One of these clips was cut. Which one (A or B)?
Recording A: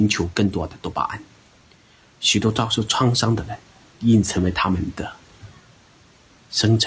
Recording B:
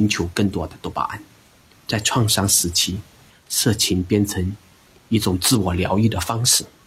B